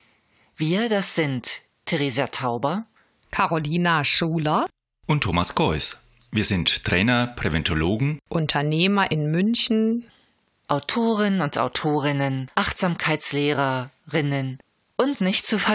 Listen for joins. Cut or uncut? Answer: cut